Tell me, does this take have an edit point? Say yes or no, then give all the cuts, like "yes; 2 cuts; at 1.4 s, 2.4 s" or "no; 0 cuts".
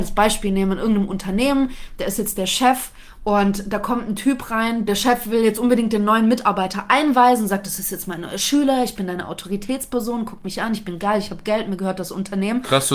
yes; 1 cut; at 4.9 s